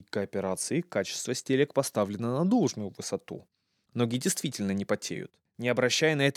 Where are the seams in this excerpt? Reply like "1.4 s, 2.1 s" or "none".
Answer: 5.4 s